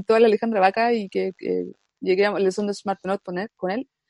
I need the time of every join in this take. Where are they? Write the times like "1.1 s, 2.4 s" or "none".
none